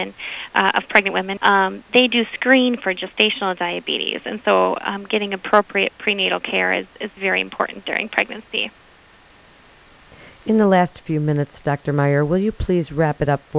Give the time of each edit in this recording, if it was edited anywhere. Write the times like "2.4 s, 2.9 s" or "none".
1.4 s